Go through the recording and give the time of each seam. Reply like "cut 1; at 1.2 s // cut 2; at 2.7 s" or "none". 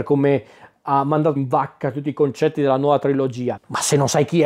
cut 1; at 1.4 s // cut 2; at 3.6 s